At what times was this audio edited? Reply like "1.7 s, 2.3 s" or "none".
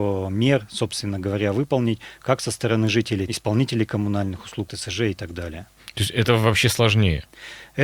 3.3 s, 4.7 s